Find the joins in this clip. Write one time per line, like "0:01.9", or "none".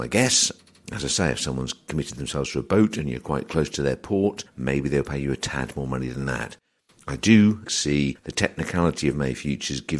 0:07.7

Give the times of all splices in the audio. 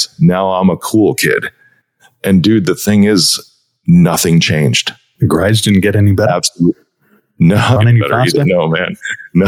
0:07.8

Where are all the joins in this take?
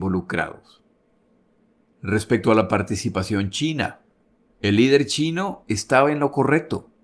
0:04.5

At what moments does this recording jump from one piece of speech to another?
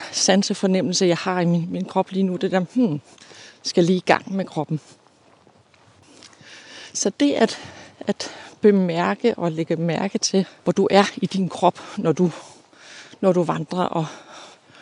none

